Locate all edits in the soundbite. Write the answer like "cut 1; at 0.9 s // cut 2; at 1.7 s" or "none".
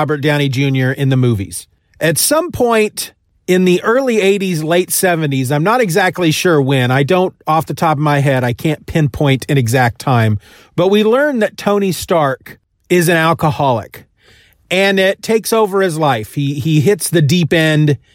none